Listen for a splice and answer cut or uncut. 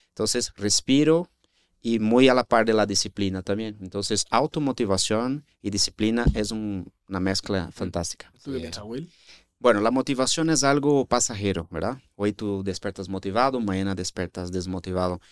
cut